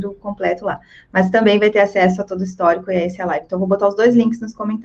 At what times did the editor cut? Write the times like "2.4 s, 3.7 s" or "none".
none